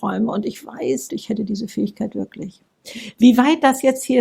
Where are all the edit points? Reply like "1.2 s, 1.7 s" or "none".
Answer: 1.1 s